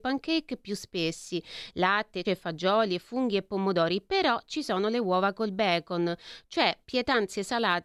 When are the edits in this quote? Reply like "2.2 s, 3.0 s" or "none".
2.2 s

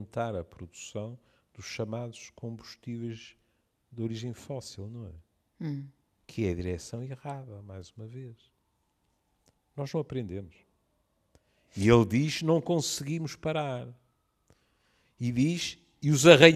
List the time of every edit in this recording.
none

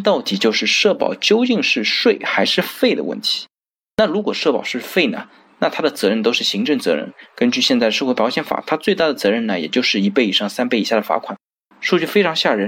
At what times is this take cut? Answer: 11.7 s

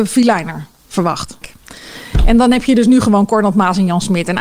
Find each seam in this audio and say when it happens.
1.4 s

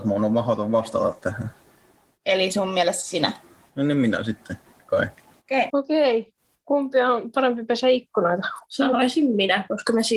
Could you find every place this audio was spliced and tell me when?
3.7 s, 5.7 s

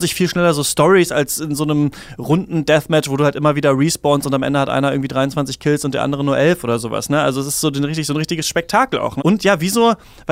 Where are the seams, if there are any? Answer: 9.2 s

